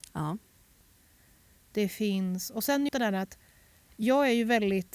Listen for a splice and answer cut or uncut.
cut